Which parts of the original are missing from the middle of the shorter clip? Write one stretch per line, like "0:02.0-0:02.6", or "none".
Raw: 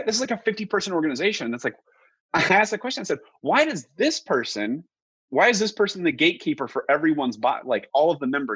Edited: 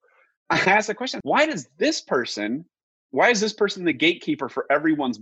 0:03.0-0:03.4